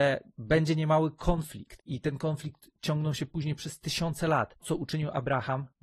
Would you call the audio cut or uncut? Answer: cut